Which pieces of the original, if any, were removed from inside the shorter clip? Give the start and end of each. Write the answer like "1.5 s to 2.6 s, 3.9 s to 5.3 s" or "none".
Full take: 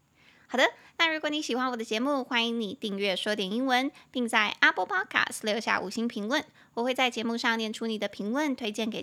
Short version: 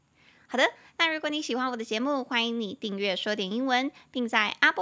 none